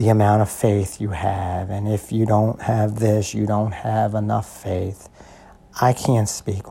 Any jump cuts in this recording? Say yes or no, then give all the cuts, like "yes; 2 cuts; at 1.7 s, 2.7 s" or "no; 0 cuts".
no; 0 cuts